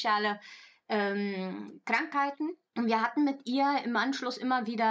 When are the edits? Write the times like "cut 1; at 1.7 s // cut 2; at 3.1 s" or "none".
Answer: cut 1; at 2.7 s